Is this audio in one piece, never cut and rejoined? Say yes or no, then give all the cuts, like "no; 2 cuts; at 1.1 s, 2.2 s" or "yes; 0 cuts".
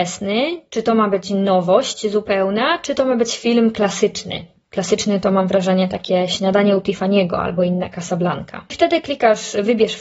yes; 0 cuts